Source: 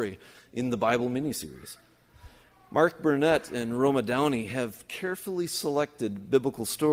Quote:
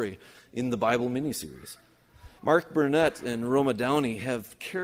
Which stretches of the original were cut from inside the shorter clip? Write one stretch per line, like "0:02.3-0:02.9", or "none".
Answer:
0:02.4-0:02.6